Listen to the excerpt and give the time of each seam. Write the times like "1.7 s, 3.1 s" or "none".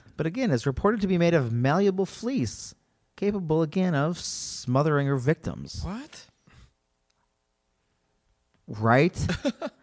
none